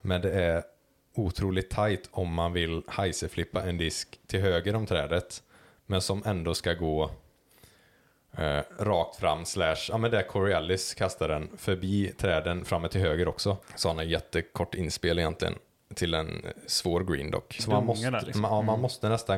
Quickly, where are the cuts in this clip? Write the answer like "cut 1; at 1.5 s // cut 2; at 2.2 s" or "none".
cut 1; at 13.6 s // cut 2; at 17.6 s